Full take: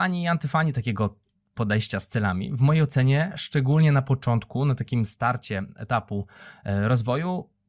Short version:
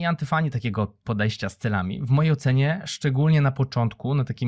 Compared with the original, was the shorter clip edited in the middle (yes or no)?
yes